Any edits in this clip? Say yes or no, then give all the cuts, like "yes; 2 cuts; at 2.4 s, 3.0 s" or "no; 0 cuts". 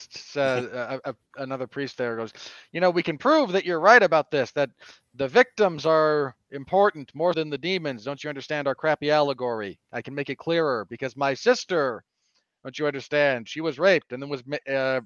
yes; 1 cut; at 7.3 s